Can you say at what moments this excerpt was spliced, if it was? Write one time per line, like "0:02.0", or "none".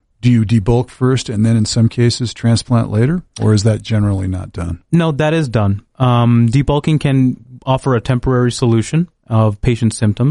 none